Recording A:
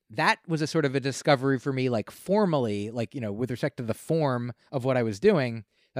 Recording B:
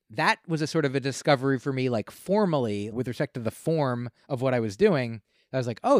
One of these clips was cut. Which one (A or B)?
B